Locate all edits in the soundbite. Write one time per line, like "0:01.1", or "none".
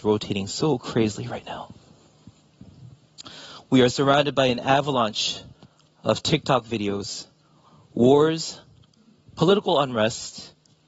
none